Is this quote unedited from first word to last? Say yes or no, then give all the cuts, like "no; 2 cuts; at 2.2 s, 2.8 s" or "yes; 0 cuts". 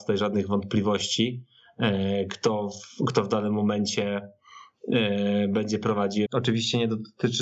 no; 1 cut; at 6.3 s